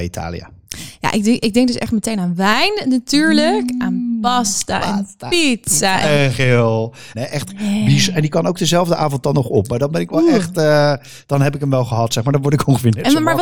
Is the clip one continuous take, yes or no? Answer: no